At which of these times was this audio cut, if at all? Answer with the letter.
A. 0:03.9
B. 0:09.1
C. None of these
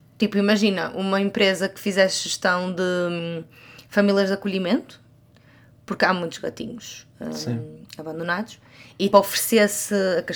B